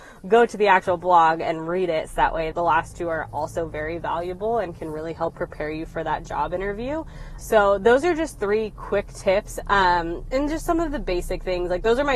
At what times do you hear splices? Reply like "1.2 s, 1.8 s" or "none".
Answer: 2.5 s, 7.4 s, 9.6 s